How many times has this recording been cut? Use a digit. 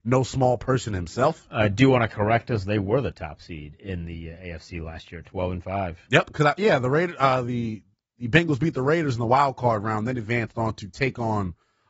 0